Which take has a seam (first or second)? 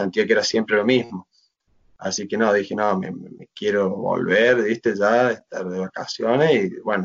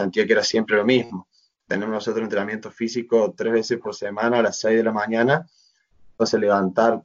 second